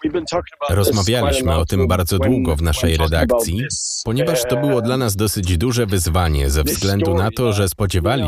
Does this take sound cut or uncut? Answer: uncut